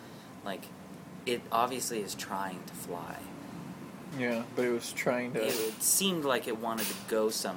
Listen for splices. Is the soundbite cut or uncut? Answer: cut